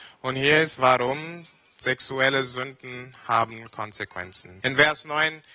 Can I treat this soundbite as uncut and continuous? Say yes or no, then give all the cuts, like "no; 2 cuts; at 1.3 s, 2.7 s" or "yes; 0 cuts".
no; 1 cut; at 4.6 s